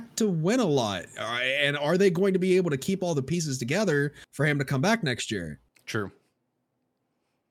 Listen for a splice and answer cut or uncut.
cut